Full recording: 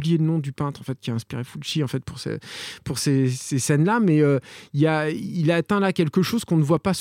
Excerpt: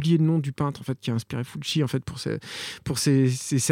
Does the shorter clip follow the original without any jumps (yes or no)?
yes